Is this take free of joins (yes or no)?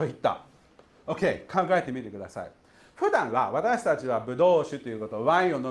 yes